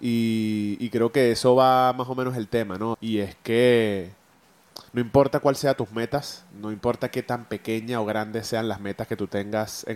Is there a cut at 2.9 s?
yes; 3 cuts; at 2.9 s, 4.9 s, 6.5 s

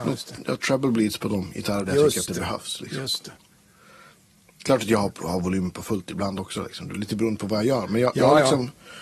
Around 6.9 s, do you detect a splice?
no; 0 cuts

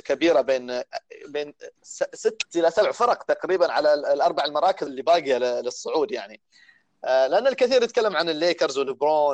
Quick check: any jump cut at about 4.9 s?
yes; 1 cut; at 4.9 s

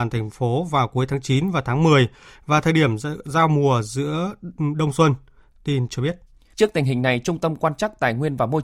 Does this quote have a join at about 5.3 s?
no; 1 cut; at 6.5 s

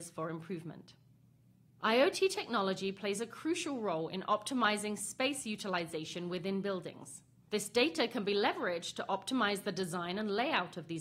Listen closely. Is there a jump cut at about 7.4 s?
yes; 2 cuts; at 1.8 s, 7.4 s

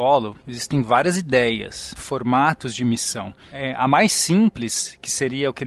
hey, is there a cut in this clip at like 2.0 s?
yes; 1 cut; at 2.0 s

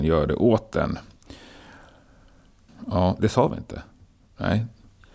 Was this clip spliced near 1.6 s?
no; 1 cut; at 3.2 s

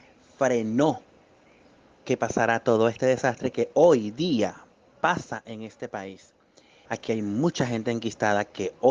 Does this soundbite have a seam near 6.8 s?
yes; 1 cut; at 6.8 s

